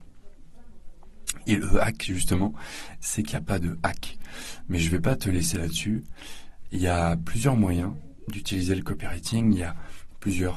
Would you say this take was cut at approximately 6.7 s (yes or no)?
no